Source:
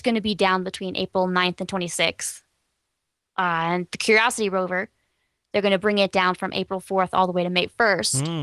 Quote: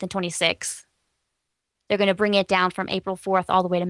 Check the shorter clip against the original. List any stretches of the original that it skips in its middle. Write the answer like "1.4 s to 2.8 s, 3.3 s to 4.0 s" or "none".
3.3 s to 5.4 s